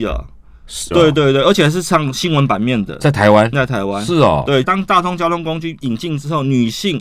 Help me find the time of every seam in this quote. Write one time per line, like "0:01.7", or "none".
0:00.9
0:03.5
0:04.6